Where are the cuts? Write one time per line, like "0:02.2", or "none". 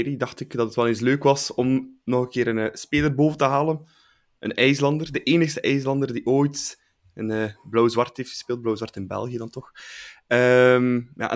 none